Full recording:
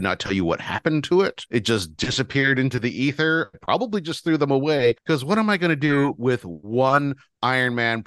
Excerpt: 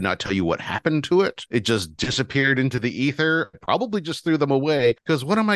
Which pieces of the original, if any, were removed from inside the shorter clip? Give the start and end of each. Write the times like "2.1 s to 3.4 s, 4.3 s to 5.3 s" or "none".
none